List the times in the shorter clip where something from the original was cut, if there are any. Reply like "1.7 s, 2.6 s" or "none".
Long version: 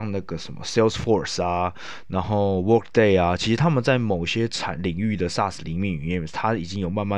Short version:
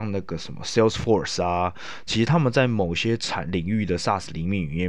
2.1 s